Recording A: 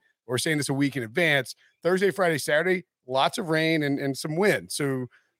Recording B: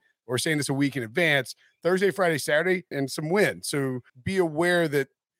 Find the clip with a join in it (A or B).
B